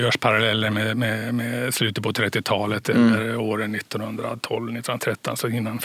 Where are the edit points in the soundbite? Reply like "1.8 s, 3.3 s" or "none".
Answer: none